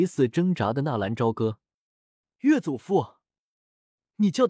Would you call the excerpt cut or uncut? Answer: cut